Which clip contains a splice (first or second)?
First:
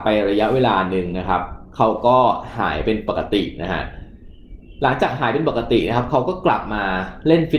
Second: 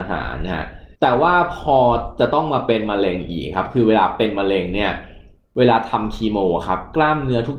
second